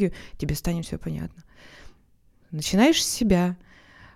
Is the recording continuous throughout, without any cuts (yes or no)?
no